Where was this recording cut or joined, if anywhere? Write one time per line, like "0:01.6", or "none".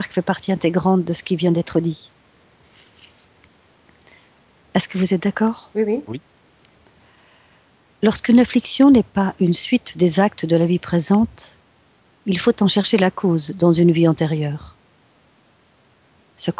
none